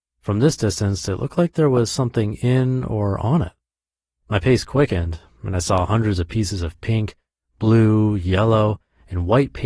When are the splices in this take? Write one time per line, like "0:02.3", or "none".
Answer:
none